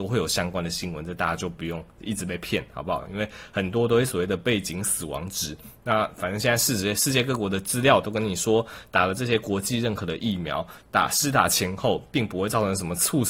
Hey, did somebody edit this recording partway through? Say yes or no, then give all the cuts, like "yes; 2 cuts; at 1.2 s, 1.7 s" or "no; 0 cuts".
no; 0 cuts